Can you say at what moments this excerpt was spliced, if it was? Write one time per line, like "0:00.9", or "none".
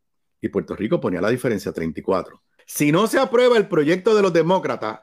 0:02.6